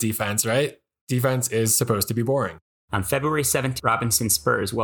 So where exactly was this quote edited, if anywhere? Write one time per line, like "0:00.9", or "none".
0:02.7
0:03.8